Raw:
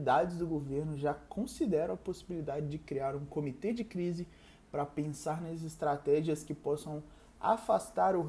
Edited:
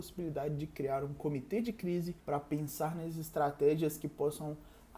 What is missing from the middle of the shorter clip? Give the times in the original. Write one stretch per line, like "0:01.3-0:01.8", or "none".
0:04.3-0:04.7